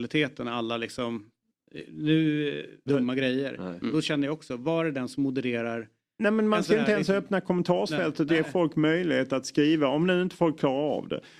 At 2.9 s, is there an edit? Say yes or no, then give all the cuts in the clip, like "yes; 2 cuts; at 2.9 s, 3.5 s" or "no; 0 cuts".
yes; 1 cut; at 2.9 s